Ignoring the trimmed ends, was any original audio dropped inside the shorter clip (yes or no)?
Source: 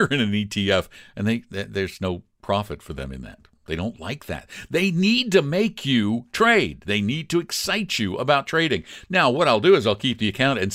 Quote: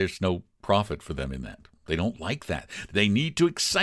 yes